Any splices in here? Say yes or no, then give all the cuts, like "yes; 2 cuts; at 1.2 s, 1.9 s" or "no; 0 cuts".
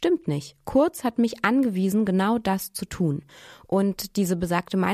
no; 0 cuts